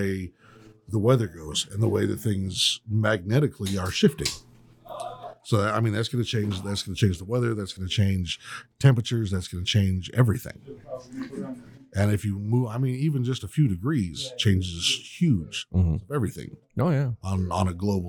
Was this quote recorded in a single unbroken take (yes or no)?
yes